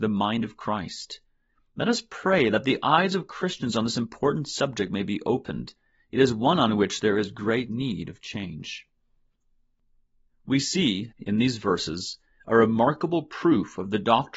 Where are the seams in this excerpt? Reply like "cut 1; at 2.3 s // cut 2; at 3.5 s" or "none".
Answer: cut 1; at 11.1 s